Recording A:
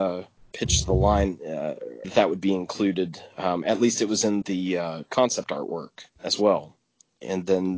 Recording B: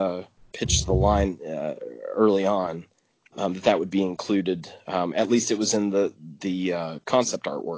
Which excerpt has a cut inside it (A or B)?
A